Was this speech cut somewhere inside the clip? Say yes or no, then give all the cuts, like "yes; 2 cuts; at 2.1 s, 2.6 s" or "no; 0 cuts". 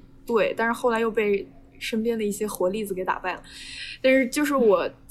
no; 0 cuts